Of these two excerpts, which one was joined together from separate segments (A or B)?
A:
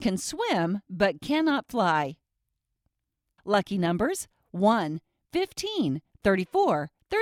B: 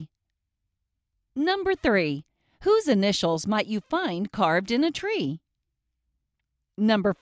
A